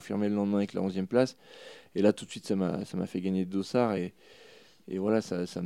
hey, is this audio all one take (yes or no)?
yes